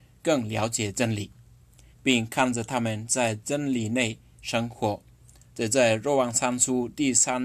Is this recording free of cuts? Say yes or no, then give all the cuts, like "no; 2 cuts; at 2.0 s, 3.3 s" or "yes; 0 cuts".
no; 1 cut; at 1.9 s